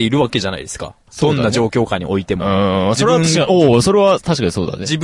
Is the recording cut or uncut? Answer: uncut